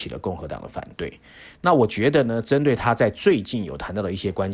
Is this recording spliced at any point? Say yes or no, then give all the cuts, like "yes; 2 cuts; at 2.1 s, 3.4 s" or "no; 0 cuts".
no; 0 cuts